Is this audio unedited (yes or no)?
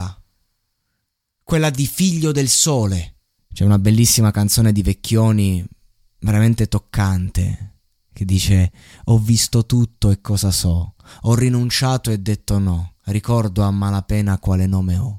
no